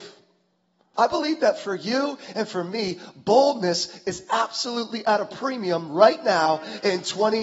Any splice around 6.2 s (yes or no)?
no